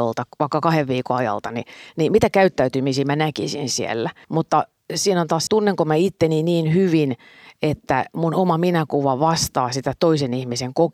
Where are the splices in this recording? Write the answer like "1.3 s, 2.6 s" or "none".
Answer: 4.2 s, 5.5 s